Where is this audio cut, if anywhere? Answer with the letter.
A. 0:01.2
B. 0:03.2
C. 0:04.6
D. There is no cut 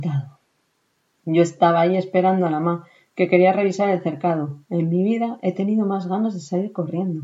A